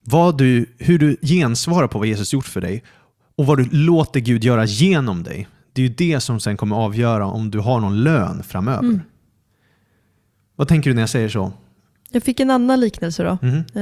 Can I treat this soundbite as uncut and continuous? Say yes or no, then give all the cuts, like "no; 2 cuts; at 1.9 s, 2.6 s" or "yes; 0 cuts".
yes; 0 cuts